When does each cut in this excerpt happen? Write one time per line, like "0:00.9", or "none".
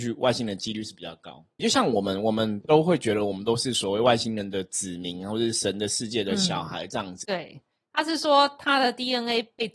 0:01.6
0:07.2